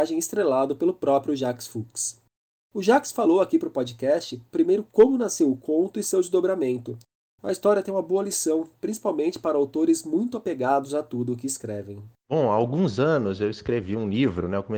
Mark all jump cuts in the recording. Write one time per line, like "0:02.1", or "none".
none